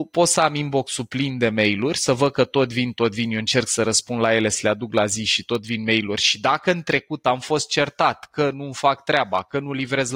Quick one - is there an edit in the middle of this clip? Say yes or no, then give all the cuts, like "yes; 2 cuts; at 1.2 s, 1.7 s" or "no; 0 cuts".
no; 0 cuts